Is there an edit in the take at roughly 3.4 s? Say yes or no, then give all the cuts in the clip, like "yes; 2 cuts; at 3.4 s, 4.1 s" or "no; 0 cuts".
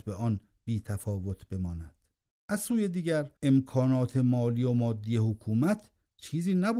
yes; 2 cuts; at 2.3 s, 3.4 s